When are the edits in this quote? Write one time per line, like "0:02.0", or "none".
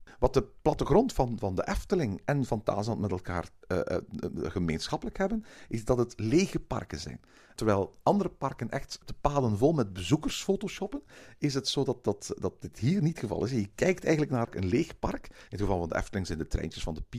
0:14.4